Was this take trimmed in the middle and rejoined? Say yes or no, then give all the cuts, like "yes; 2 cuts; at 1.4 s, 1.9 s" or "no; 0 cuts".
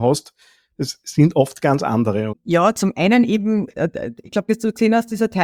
yes; 2 cuts; at 2.3 s, 4.5 s